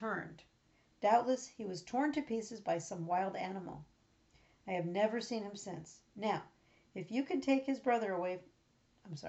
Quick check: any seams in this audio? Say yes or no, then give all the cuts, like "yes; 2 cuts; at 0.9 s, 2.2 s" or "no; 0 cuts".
no; 0 cuts